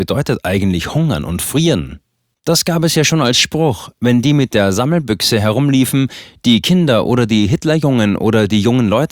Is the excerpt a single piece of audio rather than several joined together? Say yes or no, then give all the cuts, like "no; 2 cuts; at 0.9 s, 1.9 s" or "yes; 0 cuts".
no; 1 cut; at 2.3 s